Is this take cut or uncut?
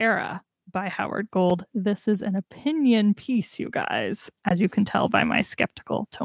uncut